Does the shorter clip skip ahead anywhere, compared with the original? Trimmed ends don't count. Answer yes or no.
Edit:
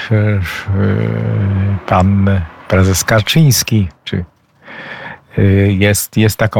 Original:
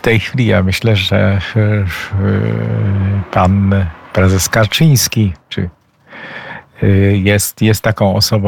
no